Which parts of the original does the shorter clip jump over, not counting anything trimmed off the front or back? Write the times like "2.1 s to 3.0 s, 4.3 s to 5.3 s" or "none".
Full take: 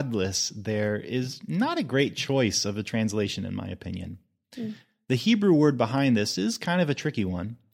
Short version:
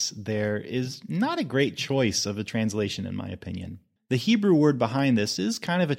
4.4 s to 5.0 s